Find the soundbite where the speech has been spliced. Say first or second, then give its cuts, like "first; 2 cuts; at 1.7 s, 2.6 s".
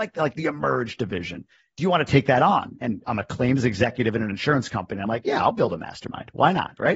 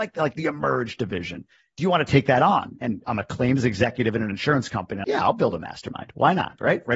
second; 1 cut; at 5.0 s